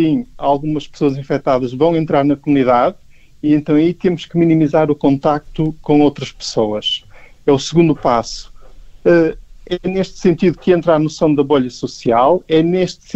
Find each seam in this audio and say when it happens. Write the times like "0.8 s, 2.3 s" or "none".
none